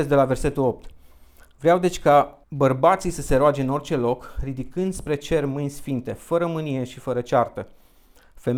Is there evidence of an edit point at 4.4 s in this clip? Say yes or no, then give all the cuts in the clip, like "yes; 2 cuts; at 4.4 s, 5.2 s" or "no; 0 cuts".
no; 1 cut; at 2.4 s